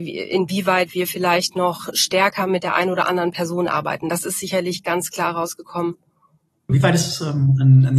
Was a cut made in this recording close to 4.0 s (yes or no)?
no